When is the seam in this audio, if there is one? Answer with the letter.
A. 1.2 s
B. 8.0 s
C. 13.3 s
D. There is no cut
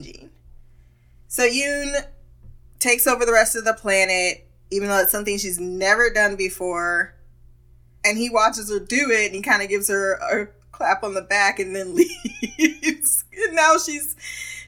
B